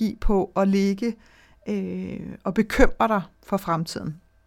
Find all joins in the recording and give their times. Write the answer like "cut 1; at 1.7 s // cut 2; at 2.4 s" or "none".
cut 1; at 3.3 s